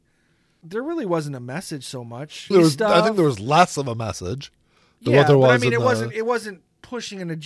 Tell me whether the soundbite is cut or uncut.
cut